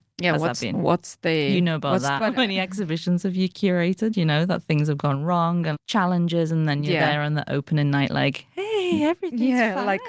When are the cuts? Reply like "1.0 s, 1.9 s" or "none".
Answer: 2.2 s, 5.7 s